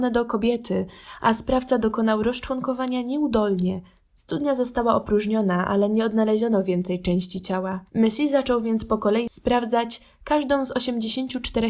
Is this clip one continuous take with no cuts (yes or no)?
no